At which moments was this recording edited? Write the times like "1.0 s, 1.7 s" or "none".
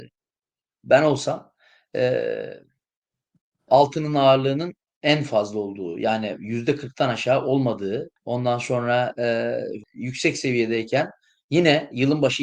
3.7 s, 8.2 s, 9.8 s